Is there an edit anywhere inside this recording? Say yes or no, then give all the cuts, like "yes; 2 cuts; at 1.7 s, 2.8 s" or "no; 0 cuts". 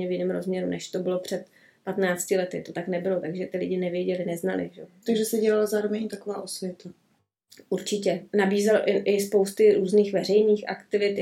no; 0 cuts